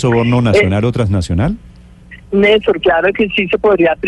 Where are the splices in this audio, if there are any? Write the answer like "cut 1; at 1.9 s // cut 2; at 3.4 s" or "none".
cut 1; at 2.2 s